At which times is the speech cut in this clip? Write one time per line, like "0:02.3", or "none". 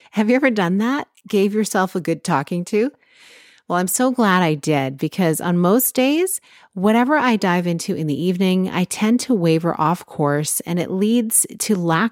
none